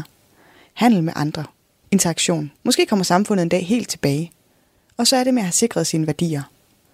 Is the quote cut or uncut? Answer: cut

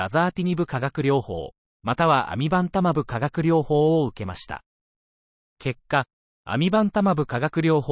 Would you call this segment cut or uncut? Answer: cut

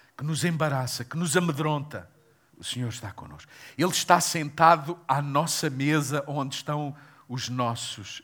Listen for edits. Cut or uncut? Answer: cut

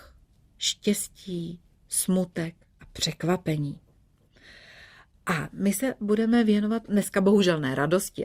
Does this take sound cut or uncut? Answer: uncut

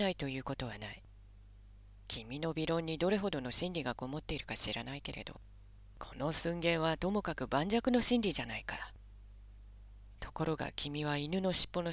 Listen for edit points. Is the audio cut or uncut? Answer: cut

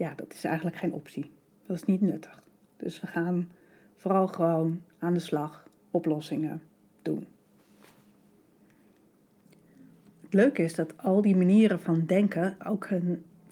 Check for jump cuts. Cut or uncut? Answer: uncut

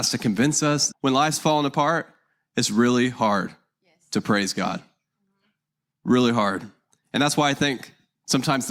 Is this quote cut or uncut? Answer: cut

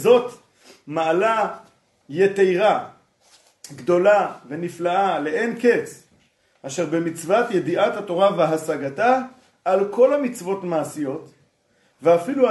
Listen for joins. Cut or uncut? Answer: uncut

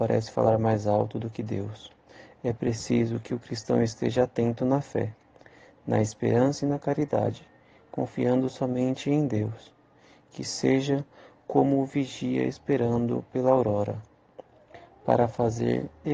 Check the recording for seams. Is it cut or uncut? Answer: uncut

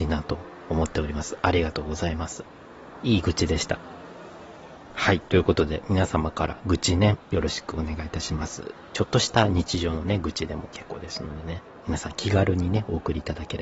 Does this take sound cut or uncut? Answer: cut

